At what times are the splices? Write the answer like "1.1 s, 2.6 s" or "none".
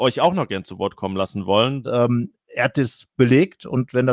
1.8 s